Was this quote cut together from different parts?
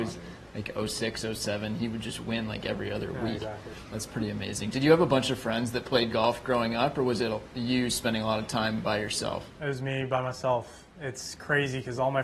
no; 0 cuts

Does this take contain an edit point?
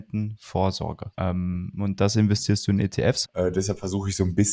yes; 2 cuts; at 1.1 s, 3.2 s

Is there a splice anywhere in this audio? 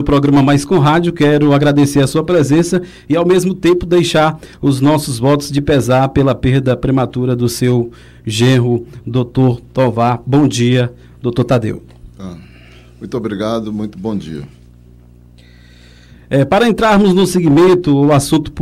no; 0 cuts

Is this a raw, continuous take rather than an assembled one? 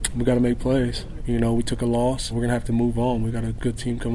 no; 2 cuts; at 1.2 s, 2.3 s

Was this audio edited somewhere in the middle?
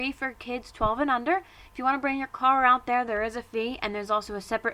no; 0 cuts

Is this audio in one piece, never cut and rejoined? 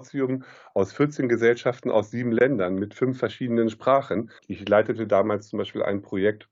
no; 1 cut; at 4.4 s

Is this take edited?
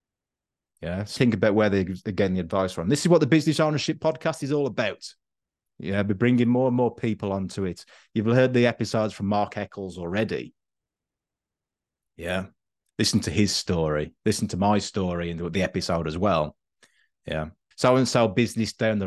yes; 2 cuts; at 1.2 s, 17.7 s

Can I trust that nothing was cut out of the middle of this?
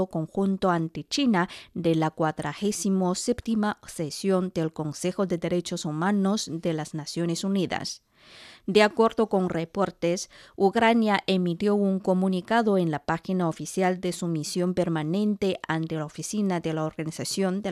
yes; 0 cuts

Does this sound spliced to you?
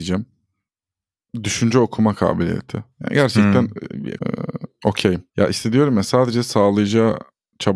yes; 2 cuts; at 4.2 s, 5.3 s

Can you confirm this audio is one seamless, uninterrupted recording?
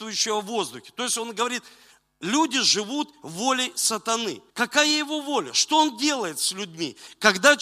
no; 1 cut; at 4.5 s

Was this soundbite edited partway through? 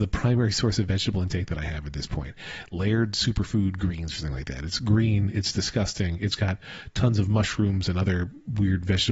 no; 0 cuts

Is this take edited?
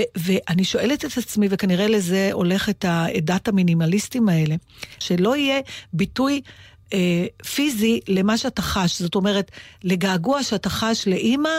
yes; 1 cut; at 5.0 s

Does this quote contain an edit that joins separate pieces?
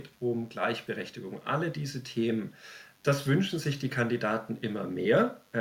yes; 1 cut; at 3.0 s

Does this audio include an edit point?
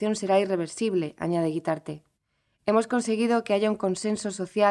no; 0 cuts

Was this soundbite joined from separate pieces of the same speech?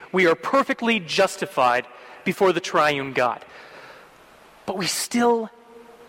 no; 0 cuts

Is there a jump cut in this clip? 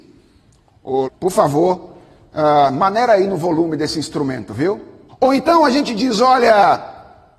yes; 2 cuts; at 1.0 s, 5.1 s

